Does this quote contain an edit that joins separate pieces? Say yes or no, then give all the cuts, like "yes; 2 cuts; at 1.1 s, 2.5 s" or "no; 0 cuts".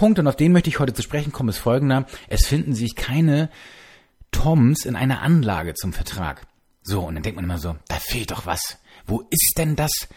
no; 0 cuts